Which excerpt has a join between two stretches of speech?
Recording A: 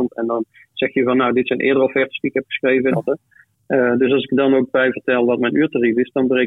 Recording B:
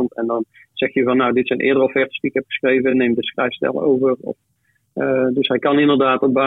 A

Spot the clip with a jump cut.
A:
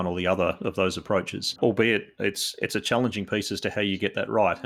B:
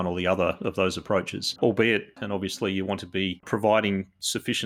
B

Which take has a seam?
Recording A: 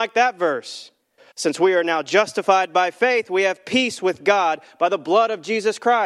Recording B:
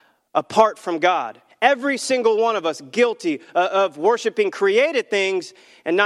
A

